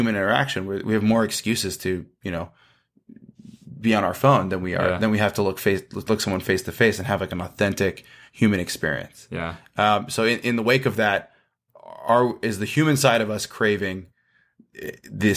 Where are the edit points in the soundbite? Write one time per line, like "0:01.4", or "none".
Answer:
none